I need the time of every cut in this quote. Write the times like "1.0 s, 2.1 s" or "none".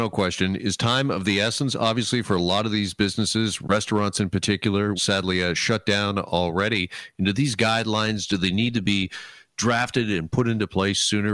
5.0 s